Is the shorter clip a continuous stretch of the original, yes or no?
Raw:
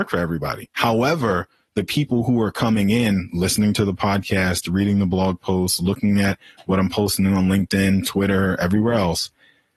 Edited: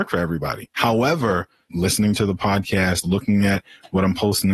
no